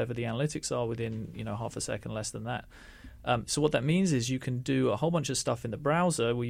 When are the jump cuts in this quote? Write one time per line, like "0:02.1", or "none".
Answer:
none